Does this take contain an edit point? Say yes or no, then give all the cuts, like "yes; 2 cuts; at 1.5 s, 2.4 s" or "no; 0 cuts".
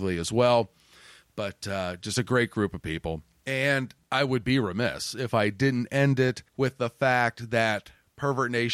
yes; 1 cut; at 6.5 s